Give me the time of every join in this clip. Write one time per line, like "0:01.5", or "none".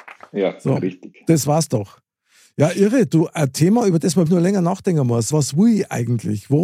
0:04.3
0:05.3